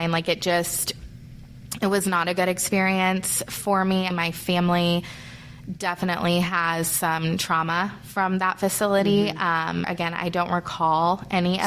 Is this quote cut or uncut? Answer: cut